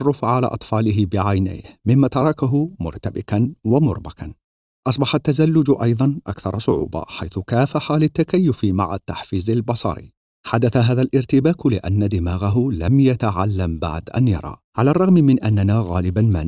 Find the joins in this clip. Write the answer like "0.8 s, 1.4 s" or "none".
14.6 s